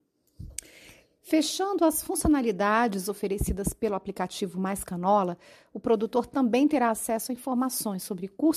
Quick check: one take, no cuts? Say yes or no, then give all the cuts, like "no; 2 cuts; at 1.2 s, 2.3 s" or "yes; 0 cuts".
yes; 0 cuts